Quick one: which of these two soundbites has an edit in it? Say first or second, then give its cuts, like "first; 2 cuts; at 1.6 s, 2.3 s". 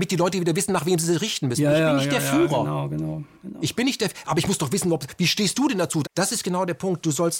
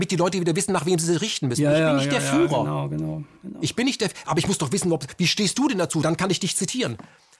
first; 1 cut; at 6.0 s